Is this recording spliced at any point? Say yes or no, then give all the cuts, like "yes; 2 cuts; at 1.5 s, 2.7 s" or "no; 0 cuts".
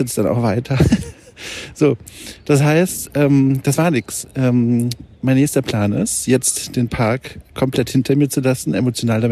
no; 0 cuts